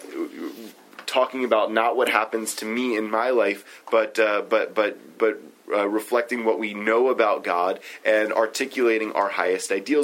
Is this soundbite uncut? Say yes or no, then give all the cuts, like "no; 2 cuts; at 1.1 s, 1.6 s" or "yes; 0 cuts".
yes; 0 cuts